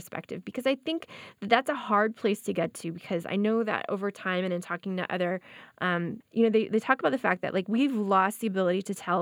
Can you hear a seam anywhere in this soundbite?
yes; 1 cut; at 6.2 s

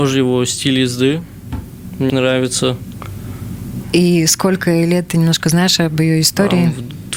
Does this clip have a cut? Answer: yes; 2 cuts; at 2.1 s, 3.8 s

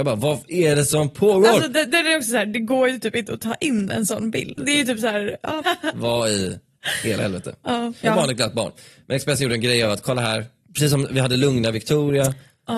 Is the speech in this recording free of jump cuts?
no; 3 cuts; at 4.6 s, 5.6 s, 8.0 s

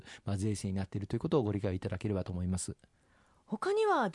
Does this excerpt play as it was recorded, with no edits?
yes; 0 cuts

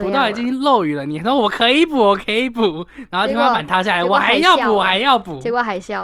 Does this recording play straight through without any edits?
yes; 0 cuts

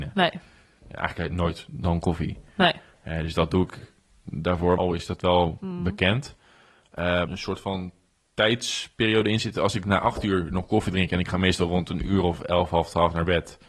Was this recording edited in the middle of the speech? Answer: yes; 2 cuts; at 4.8 s, 7.3 s

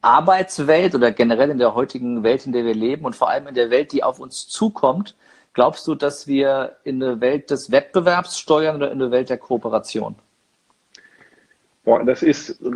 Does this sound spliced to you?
no; 0 cuts

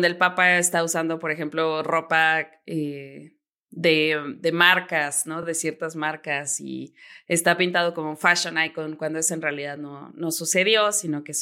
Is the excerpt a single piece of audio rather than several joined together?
yes; 0 cuts

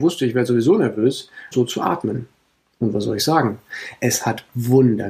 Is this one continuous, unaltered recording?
no; 1 cut; at 1.5 s

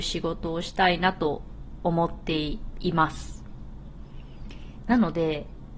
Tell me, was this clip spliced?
no; 0 cuts

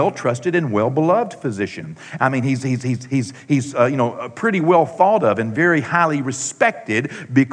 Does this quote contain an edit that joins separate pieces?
yes; 1 cut; at 2.2 s

